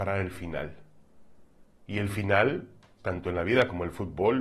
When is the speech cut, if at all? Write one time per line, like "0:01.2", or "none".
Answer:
0:03.0